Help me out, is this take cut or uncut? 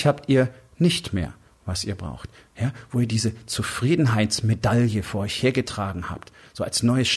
cut